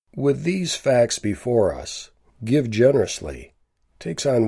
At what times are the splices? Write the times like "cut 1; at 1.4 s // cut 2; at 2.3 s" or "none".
cut 1; at 2.3 s